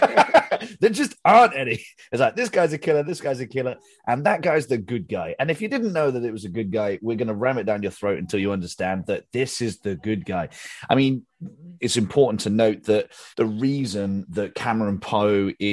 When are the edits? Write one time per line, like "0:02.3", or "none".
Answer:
0:11.8
0:13.3